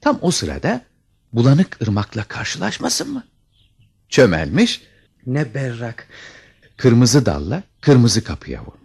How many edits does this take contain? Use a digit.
2